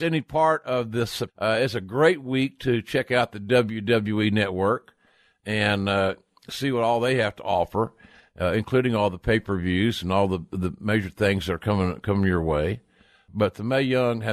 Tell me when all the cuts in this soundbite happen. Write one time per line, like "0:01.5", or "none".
0:01.3